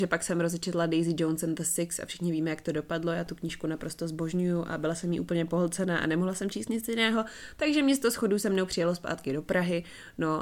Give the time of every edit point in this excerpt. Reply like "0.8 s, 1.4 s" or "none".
none